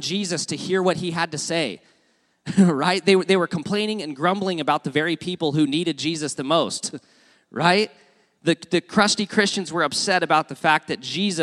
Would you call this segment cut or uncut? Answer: uncut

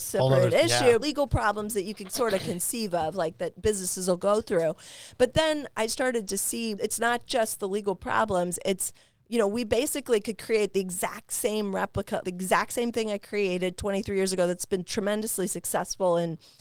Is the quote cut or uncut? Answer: cut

